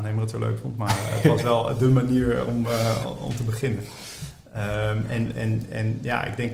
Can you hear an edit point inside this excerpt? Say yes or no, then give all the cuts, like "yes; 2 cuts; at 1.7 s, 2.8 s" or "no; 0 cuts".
no; 0 cuts